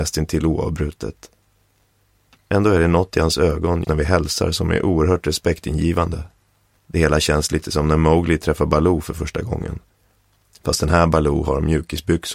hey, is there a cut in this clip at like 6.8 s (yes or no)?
yes